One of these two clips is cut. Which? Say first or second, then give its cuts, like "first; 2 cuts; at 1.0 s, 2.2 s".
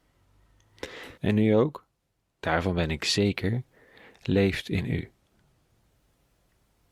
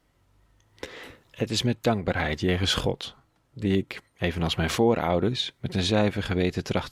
first; 1 cut; at 1.2 s